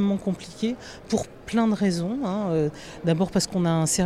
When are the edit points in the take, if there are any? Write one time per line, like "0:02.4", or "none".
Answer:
none